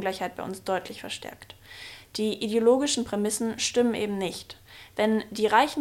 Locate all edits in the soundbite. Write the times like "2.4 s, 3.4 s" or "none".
none